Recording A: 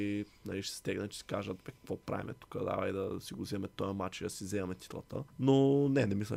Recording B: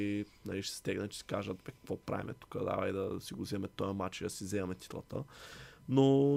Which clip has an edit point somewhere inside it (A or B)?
A